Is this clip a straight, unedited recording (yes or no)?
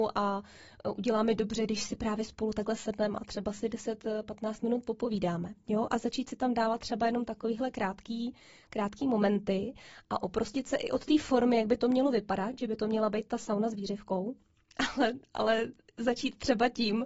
yes